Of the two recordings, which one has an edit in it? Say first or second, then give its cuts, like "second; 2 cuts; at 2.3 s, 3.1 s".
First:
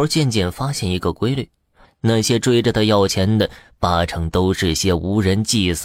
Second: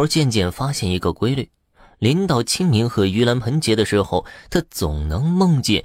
first; 1 cut; at 1.8 s